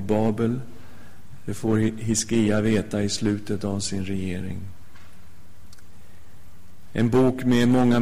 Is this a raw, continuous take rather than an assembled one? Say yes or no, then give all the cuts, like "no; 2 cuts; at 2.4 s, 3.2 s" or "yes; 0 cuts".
yes; 0 cuts